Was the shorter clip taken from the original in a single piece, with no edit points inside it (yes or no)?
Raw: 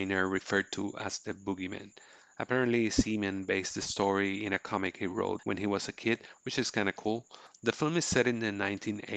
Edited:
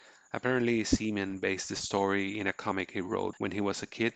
yes